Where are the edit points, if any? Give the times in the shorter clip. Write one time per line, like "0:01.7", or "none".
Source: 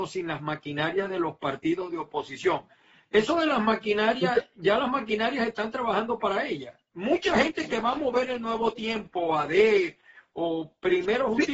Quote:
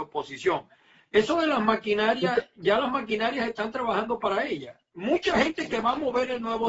none